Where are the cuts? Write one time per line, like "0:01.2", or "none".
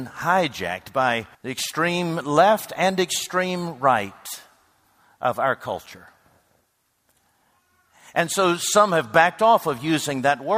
0:01.3